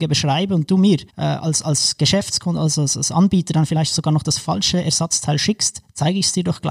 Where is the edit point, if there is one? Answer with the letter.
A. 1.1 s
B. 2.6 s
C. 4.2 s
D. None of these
A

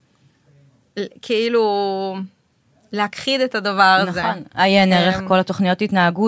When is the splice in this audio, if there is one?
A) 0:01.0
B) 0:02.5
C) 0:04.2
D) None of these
D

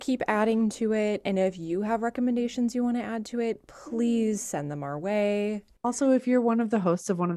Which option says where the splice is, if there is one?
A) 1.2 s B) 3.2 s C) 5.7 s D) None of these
D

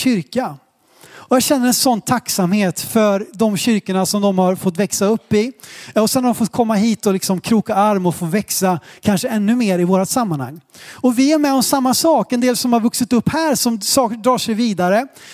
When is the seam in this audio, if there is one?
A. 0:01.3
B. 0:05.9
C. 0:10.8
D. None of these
D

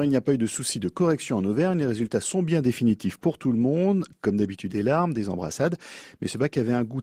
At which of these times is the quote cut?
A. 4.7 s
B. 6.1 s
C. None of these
A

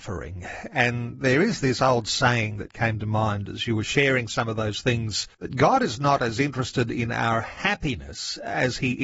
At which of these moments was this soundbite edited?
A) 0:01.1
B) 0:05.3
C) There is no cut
B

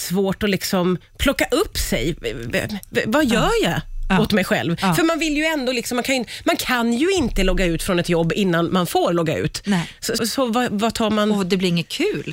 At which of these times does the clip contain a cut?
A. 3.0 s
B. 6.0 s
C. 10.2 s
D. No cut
C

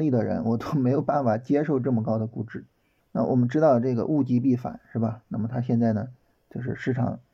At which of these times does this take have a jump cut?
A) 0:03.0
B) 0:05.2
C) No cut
A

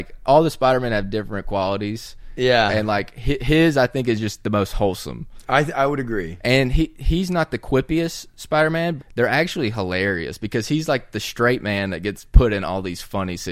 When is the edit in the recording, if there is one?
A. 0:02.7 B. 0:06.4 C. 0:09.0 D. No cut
C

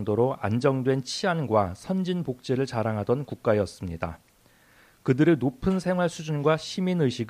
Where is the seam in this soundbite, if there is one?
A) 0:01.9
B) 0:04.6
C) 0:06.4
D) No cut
D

